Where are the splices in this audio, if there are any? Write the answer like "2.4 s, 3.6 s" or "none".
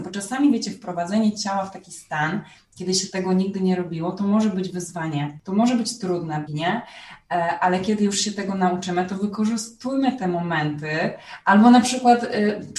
6.5 s